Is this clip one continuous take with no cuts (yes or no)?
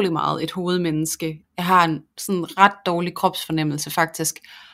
no